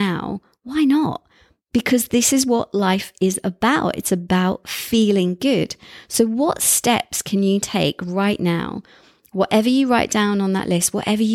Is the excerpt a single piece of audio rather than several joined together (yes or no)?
yes